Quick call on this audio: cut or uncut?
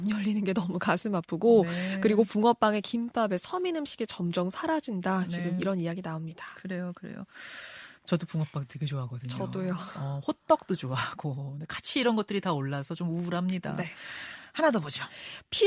uncut